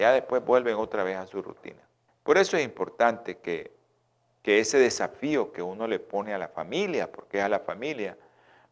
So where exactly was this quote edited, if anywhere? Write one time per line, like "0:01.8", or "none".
0:02.1